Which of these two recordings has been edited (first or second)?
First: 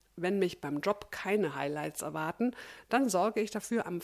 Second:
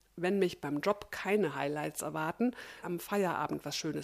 second